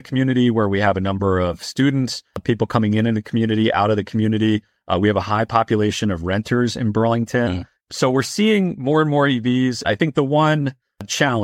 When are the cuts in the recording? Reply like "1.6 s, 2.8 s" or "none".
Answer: 7.8 s, 9.8 s